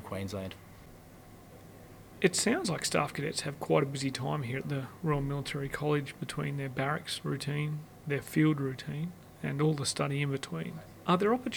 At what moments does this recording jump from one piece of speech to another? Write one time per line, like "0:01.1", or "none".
none